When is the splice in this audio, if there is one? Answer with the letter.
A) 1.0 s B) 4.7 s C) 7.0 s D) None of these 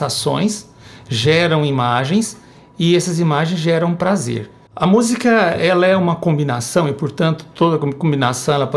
B